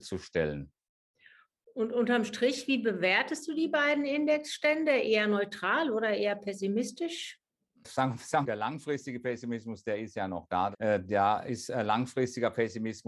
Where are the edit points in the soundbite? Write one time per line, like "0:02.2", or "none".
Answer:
0:08.4
0:10.7